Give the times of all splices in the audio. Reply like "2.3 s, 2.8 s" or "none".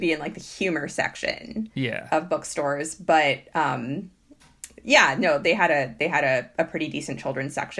none